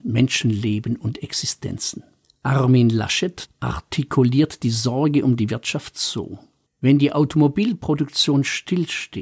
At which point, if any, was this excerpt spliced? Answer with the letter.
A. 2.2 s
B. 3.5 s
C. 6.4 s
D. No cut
B